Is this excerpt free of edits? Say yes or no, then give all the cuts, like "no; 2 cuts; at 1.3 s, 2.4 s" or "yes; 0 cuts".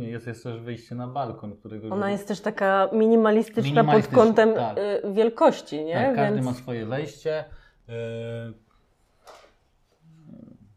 yes; 0 cuts